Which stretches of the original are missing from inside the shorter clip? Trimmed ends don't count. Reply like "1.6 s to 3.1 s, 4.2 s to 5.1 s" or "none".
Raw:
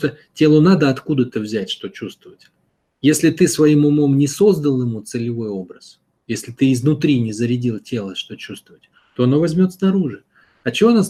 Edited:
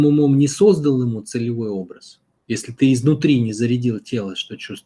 none